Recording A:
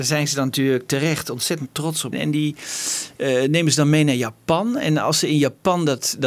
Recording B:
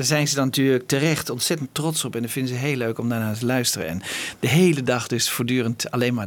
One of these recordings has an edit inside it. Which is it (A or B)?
A